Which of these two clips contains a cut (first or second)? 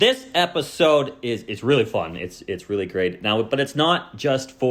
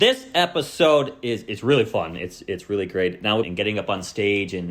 second